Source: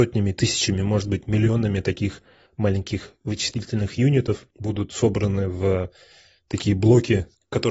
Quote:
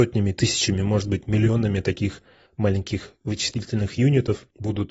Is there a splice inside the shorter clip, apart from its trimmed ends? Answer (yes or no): no